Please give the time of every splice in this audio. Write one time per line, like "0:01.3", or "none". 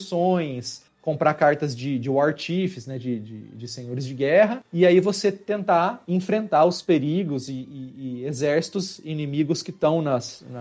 none